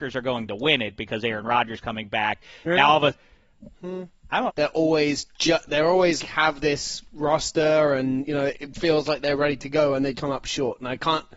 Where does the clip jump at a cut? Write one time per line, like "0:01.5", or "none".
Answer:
0:04.5
0:06.2
0:10.1